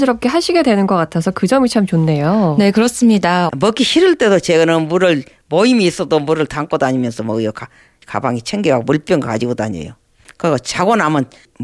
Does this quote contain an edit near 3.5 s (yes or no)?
yes